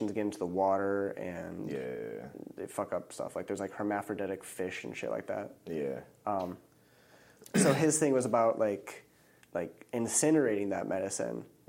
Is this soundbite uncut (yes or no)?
no